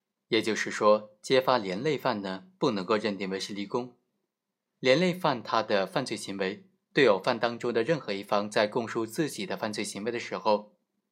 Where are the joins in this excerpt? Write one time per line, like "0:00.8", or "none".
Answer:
0:04.6
0:06.9